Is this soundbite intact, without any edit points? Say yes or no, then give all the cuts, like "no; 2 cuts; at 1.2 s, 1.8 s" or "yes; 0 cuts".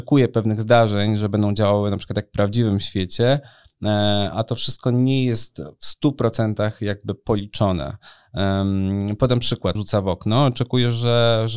no; 2 cuts; at 4.3 s, 9.8 s